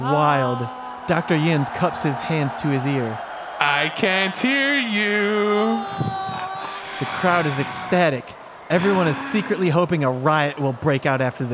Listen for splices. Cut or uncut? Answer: uncut